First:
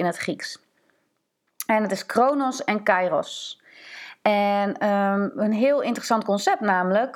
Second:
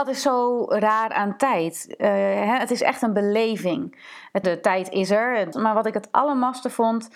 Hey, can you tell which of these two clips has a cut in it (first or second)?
second